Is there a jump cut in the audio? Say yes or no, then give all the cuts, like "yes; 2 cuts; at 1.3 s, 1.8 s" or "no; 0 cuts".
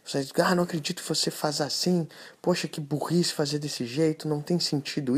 no; 0 cuts